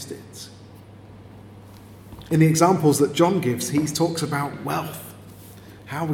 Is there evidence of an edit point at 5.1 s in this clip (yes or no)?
no